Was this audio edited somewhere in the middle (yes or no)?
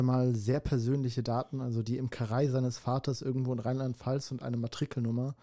no